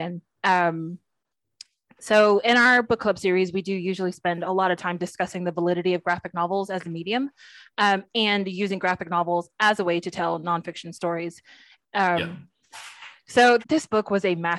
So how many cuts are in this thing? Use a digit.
2